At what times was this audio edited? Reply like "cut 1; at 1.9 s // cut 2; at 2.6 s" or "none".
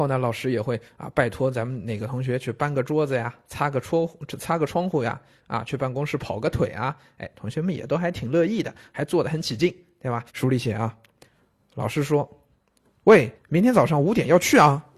cut 1; at 10.3 s // cut 2; at 13.4 s